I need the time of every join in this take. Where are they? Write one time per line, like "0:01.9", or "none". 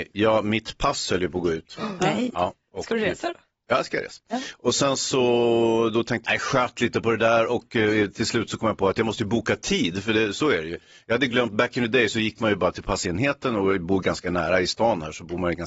0:06.2